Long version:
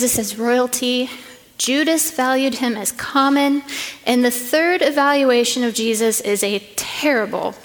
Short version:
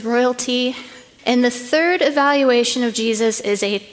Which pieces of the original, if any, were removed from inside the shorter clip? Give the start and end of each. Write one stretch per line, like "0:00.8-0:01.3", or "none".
0:01.5-0:04.0